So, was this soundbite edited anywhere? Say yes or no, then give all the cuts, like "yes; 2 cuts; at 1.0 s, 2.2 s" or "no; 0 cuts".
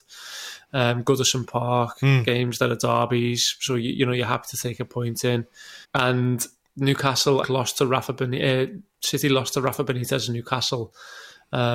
yes; 2 cuts; at 5.8 s, 7.4 s